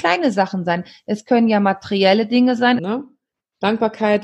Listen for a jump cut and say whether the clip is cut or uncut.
cut